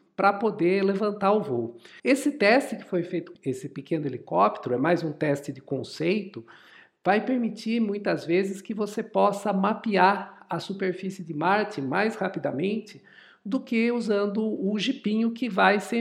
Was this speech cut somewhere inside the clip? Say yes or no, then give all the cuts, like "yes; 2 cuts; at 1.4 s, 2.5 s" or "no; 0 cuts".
yes; 2 cuts; at 2.0 s, 3.4 s